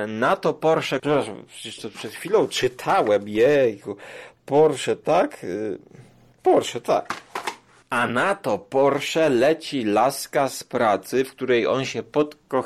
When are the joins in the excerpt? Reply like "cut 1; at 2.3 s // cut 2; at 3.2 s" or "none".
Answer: cut 1; at 1.0 s